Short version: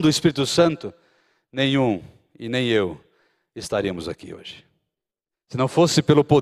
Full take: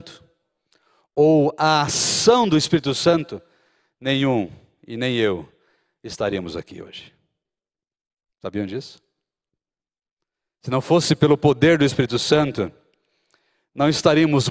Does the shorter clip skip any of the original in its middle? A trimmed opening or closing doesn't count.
yes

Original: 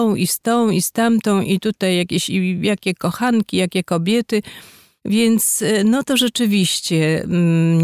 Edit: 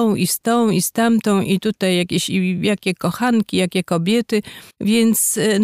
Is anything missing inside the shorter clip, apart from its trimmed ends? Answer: yes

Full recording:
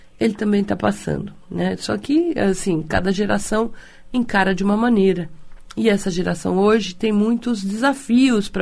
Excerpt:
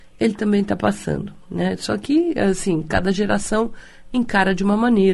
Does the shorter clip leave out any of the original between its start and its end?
no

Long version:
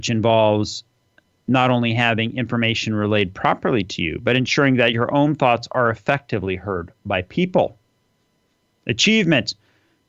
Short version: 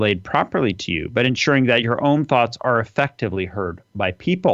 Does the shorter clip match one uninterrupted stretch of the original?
yes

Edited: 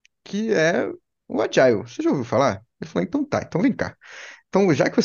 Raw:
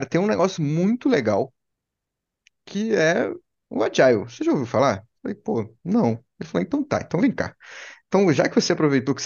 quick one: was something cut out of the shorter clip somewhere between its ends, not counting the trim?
yes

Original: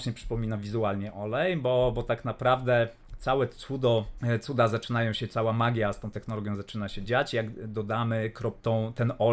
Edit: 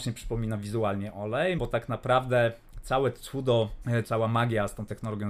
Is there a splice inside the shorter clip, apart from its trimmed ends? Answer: yes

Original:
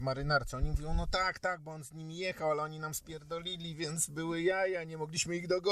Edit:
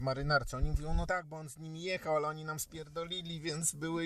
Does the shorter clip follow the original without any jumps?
no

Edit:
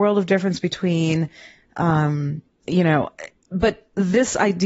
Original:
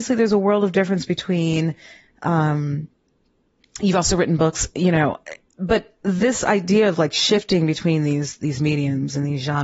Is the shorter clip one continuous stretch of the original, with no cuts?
no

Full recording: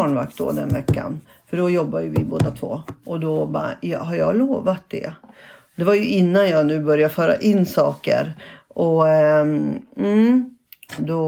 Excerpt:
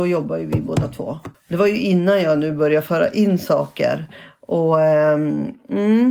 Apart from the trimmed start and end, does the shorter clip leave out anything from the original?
yes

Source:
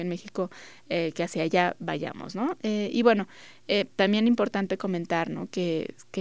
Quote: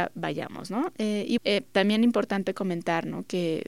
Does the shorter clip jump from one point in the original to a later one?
yes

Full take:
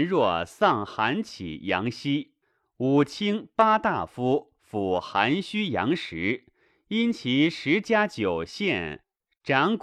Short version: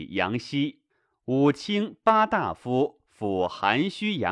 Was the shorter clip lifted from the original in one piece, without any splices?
yes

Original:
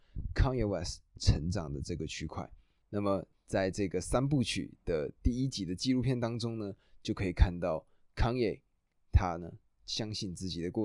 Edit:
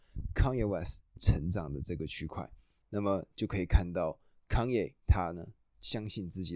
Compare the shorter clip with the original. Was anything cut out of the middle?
yes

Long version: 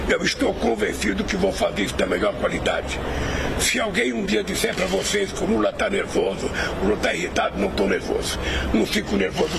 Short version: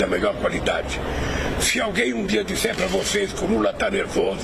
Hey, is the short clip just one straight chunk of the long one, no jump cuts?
yes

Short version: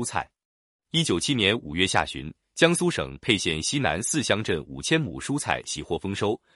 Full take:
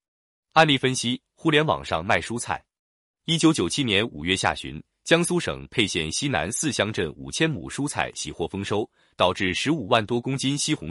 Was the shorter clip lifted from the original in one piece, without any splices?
no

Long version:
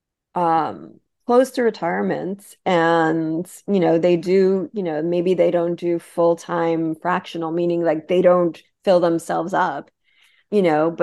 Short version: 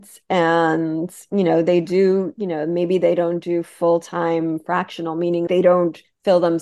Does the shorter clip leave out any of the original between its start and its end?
yes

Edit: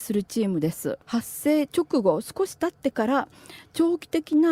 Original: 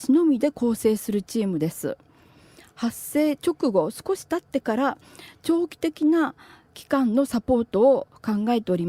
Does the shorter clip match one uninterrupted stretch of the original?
no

